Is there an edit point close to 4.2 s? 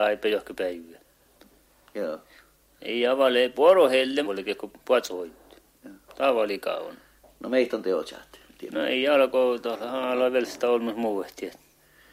yes; 1 cut; at 4.2 s

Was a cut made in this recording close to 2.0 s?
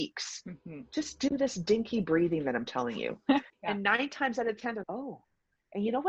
no; 2 cuts; at 3.5 s, 4.8 s

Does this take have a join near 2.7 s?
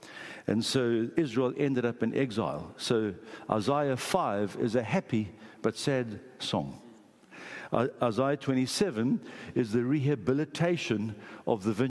no; 1 cut; at 1.1 s

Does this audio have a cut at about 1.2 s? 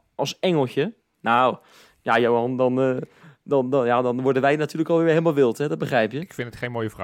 yes; 1 cut; at 1.2 s

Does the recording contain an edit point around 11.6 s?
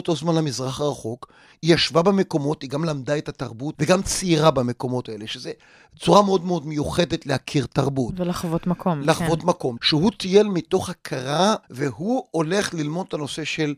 yes; 3 cuts; at 3.7 s, 9.8 s, 11.6 s

